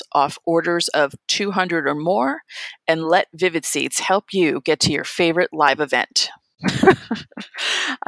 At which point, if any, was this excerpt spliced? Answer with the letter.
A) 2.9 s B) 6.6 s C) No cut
B